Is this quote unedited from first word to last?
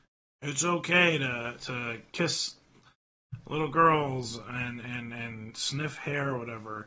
yes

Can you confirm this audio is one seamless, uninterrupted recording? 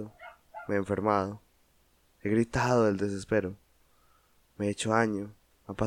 yes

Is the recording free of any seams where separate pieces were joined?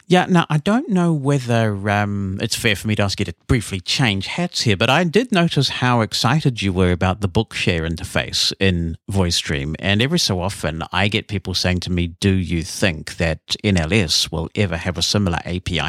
yes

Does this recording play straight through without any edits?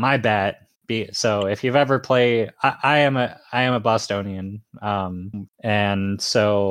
no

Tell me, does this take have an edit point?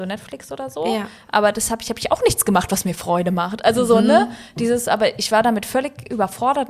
no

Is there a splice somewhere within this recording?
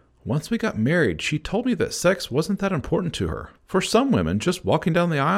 yes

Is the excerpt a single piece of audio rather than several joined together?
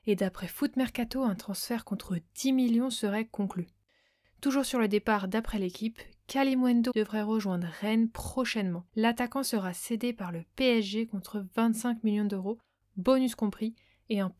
no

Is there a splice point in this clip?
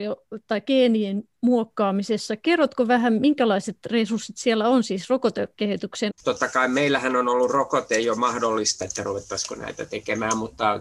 yes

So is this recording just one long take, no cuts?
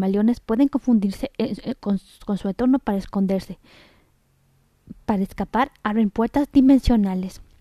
yes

